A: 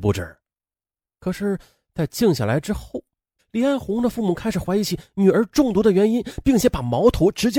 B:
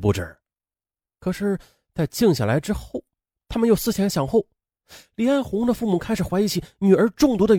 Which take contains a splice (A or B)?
A